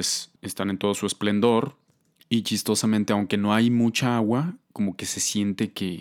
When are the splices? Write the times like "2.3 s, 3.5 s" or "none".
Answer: none

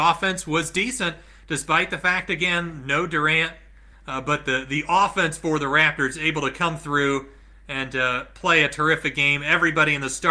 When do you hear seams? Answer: 3.9 s

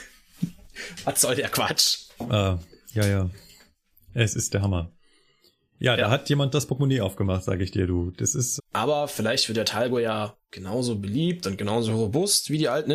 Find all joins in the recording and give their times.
8.6 s, 10.4 s

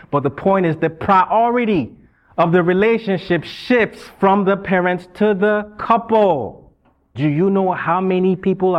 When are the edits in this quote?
7.1 s

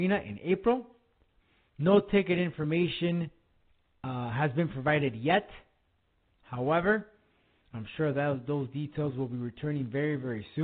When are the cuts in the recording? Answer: none

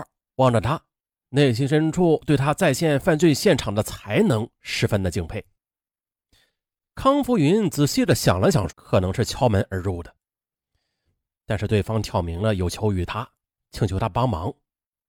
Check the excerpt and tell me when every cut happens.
8.7 s, 11.1 s

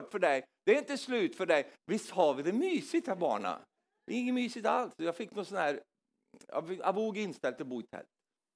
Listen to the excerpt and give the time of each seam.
1.7 s

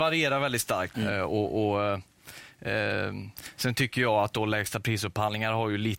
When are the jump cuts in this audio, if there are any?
0.9 s

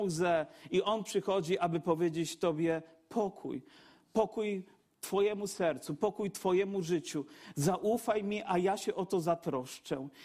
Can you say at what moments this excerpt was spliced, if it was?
none

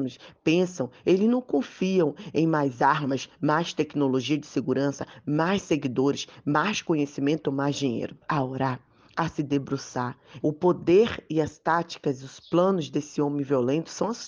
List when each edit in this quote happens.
8.2 s, 10.4 s

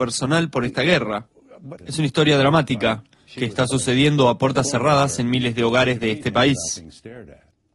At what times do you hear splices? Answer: 1.8 s

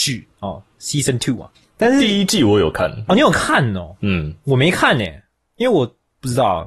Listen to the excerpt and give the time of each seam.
3.1 s

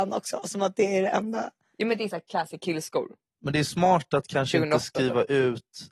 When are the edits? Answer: none

